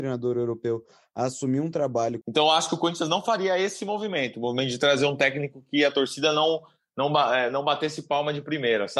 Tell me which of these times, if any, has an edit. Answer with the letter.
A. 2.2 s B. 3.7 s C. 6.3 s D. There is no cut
A